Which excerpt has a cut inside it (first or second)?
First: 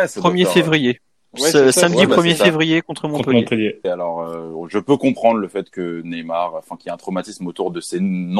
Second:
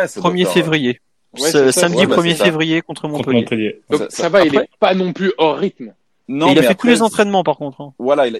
first